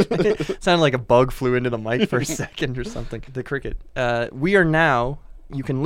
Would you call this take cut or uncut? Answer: cut